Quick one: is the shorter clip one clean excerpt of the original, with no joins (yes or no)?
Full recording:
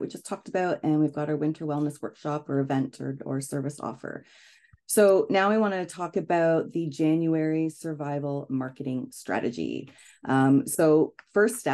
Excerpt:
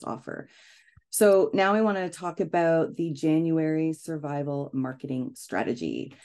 yes